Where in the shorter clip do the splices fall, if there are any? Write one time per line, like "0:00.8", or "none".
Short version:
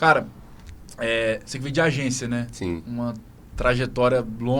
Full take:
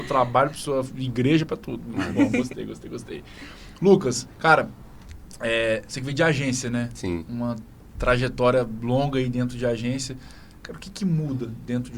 none